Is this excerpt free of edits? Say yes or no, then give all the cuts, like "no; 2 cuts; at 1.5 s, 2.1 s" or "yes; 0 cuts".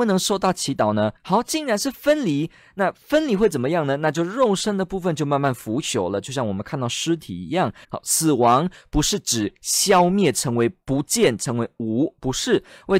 no; 2 cuts; at 1.2 s, 7.8 s